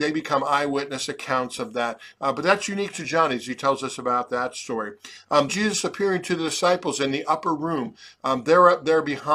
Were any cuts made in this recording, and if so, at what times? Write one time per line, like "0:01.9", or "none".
0:05.5